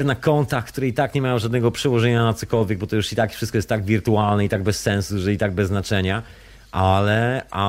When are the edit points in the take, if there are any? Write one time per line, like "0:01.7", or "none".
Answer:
none